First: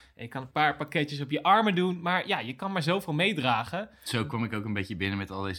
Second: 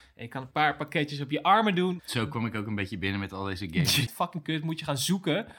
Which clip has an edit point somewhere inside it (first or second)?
second